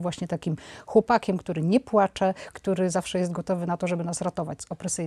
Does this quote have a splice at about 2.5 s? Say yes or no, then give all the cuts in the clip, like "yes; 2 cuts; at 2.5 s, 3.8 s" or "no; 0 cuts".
yes; 1 cut; at 2.5 s